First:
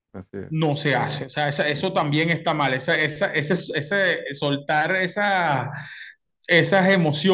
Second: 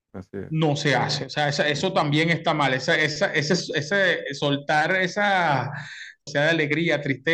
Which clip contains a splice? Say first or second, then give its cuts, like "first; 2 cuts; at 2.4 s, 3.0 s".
second; 1 cut; at 6.3 s